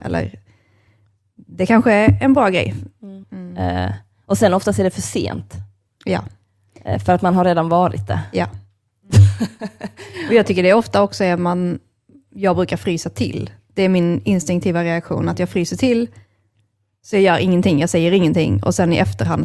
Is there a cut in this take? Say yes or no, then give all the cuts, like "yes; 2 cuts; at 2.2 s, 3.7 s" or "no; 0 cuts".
yes; 1 cut; at 3.2 s